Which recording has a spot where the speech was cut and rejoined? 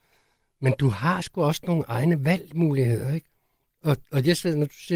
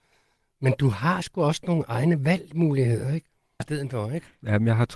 second; 1 cut; at 3.6 s

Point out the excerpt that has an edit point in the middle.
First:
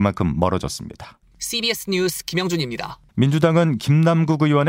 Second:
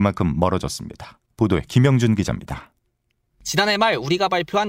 first; 2 cuts; at 1.2 s, 3.1 s

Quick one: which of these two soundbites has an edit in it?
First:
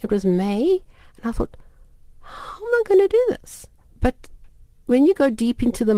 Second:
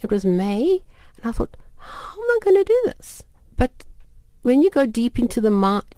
second; 1 cut; at 1.7 s

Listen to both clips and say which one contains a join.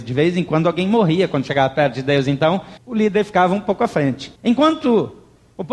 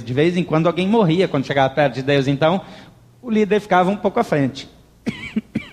first; 2 cuts; at 2.8 s, 4.4 s

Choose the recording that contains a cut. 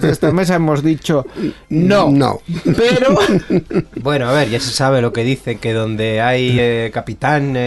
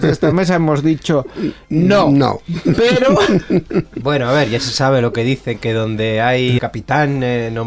second; 1 cut; at 6.6 s

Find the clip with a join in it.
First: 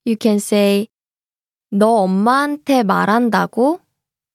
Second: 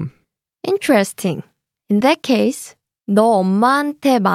second; 1 cut; at 3.0 s

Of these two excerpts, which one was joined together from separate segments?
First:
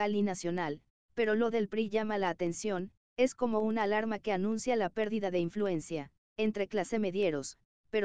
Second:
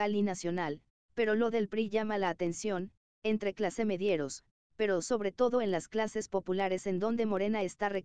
second; 1 cut; at 3.1 s

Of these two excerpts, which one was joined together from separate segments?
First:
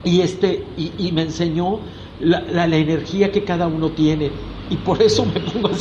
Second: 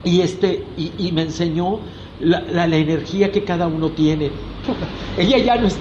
second; 1 cut; at 4.6 s

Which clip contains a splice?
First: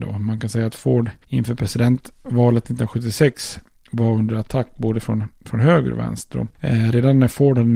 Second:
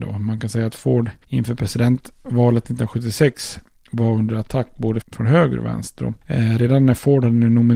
second; 1 cut; at 5.0 s

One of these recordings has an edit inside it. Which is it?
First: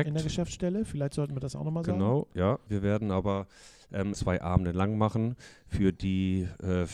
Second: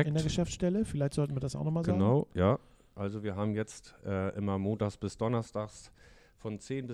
first; 2 cuts; at 2.7 s, 4.1 s

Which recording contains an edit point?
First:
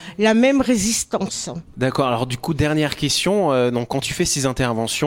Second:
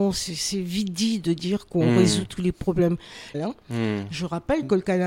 second; 1 cut; at 3.3 s

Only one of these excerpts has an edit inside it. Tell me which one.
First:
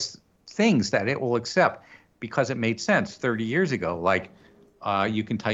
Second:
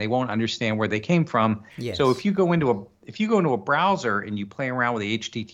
second; 1 cut; at 1.7 s

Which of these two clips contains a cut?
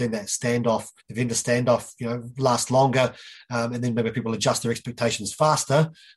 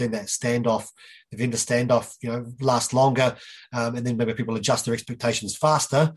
first; 1 cut; at 1.0 s

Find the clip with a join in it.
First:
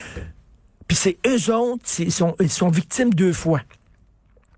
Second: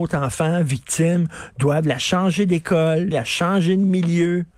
second; 1 cut; at 3.1 s

